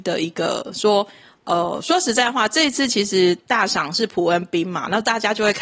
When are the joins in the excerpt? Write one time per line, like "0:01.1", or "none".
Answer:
none